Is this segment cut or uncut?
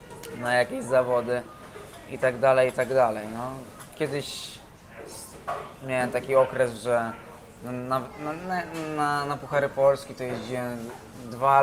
uncut